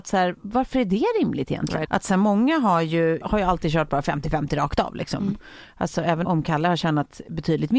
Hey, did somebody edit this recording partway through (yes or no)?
yes